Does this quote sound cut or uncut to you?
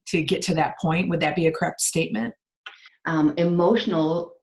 cut